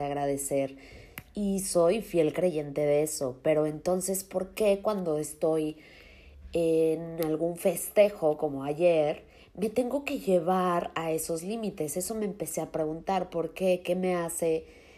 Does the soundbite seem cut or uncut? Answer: uncut